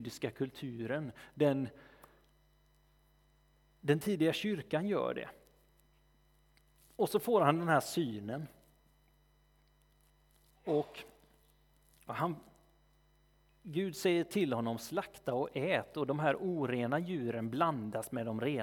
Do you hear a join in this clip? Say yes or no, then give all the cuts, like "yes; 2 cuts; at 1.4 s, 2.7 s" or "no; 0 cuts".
no; 0 cuts